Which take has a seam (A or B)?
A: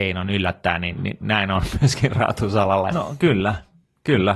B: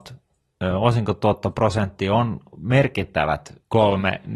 A